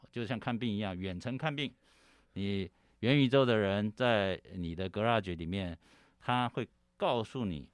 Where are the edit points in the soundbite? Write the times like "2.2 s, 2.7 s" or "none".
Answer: none